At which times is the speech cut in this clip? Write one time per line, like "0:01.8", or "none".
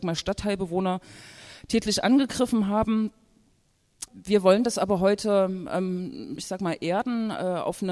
0:04.1
0:06.4